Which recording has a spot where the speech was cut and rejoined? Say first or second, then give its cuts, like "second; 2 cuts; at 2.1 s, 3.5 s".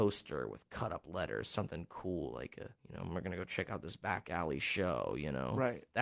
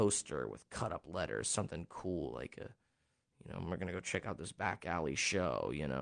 first; 1 cut; at 2.8 s